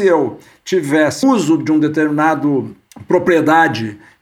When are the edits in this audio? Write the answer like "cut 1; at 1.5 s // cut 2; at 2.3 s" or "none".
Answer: cut 1; at 1.2 s